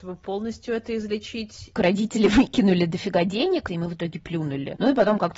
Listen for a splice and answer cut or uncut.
cut